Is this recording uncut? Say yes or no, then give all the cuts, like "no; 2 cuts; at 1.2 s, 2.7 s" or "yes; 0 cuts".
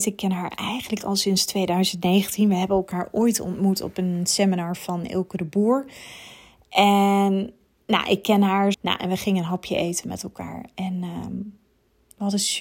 no; 1 cut; at 8.7 s